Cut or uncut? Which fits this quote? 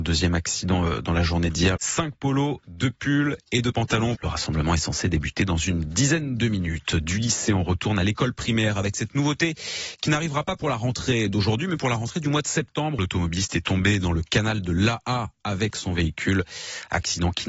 cut